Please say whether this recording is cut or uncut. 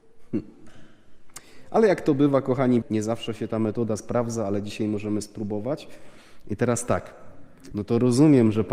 cut